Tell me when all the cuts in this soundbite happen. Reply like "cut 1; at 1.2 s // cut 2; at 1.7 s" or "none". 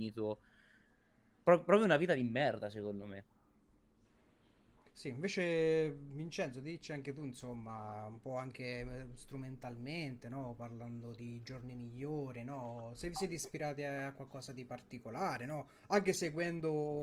cut 1; at 4.9 s